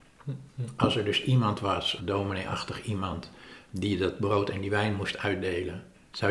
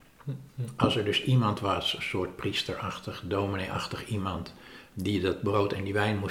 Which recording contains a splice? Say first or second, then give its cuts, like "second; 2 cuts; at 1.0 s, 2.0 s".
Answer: first; 1 cut; at 2.0 s